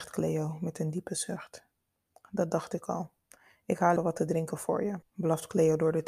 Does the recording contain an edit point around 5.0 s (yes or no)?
yes